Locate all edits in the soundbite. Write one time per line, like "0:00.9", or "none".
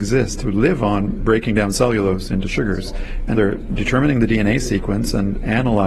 0:03.3